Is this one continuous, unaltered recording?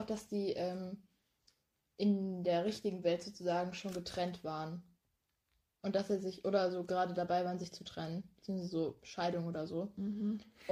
yes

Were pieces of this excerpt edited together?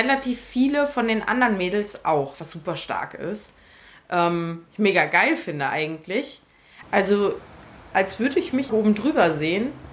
yes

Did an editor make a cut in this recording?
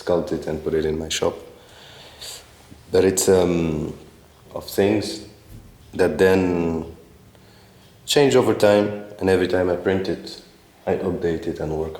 yes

